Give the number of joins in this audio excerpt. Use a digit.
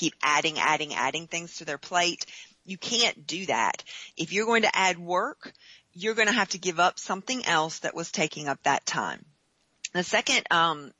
0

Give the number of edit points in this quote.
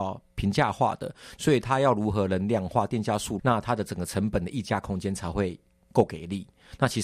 2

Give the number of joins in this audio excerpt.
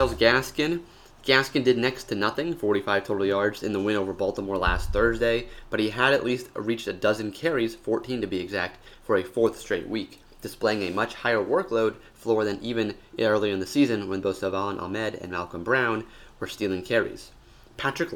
0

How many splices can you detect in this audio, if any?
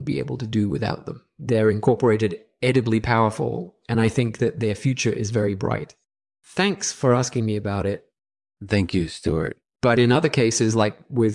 1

